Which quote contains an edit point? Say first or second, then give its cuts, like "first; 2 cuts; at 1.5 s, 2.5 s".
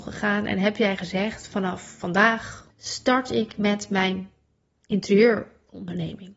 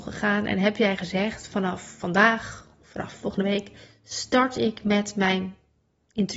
first; 1 cut; at 2.7 s